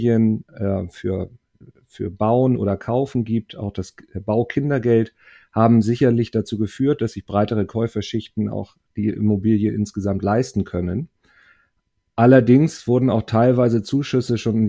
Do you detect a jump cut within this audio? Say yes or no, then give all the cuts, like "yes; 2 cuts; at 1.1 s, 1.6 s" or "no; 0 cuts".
no; 0 cuts